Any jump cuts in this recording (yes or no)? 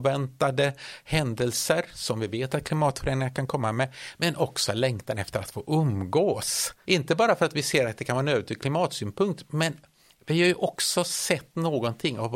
yes